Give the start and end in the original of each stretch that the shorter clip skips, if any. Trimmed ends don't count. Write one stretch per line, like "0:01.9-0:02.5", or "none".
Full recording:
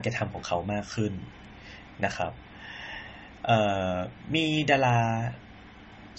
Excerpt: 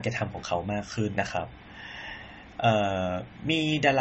0:01.1-0:02.0